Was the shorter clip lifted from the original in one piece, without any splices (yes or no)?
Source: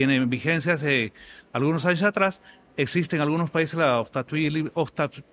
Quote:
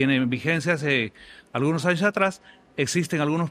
yes